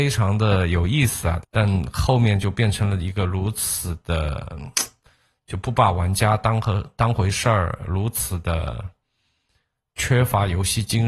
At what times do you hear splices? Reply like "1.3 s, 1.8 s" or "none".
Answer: 1.4 s